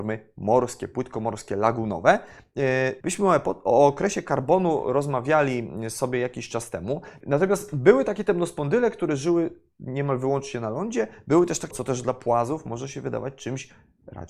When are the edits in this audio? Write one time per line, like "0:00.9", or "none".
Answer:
0:03.0
0:07.2
0:11.7